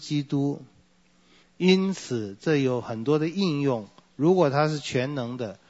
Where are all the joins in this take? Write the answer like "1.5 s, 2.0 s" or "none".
1.4 s